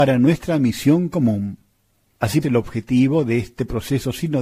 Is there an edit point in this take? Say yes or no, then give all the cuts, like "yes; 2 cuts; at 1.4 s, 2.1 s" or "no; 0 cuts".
yes; 1 cut; at 2.4 s